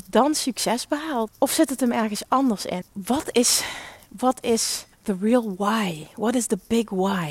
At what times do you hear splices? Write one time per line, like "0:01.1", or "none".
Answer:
0:01.3
0:02.8
0:04.9